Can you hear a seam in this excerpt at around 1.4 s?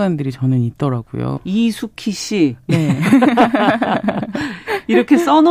yes; 1 cut; at 1.4 s

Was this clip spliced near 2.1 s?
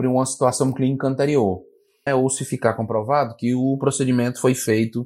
yes; 1 cut; at 2.1 s

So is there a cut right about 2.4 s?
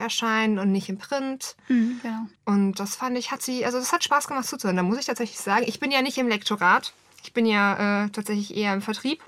yes; 1 cut; at 2.4 s

